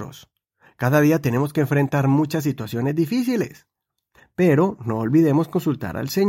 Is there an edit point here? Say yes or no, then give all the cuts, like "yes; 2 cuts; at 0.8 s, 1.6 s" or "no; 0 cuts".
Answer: yes; 1 cut; at 4.2 s